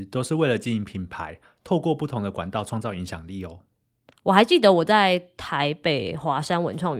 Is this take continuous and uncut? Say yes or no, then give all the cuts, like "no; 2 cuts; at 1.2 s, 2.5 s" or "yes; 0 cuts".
no; 1 cut; at 4.1 s